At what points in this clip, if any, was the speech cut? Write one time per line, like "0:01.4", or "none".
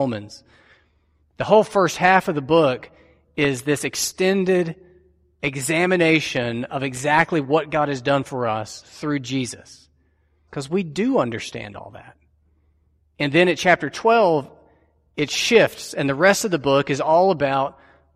0:10.5
0:13.1